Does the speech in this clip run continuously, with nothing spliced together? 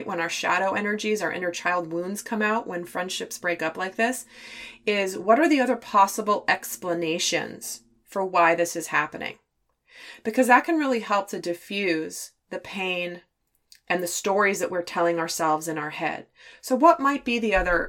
yes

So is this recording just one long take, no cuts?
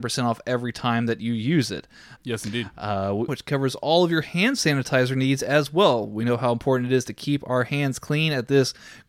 no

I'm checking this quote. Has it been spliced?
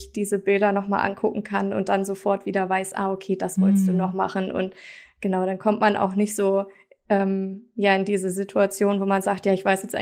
no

